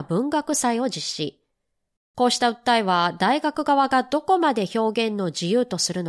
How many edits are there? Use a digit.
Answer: 1